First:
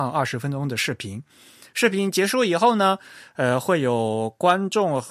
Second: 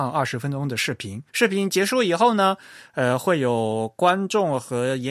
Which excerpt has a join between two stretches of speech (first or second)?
second